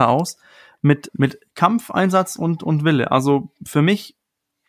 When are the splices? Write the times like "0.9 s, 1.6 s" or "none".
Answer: 1.1 s